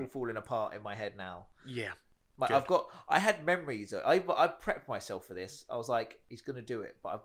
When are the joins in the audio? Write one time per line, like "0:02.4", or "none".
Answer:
none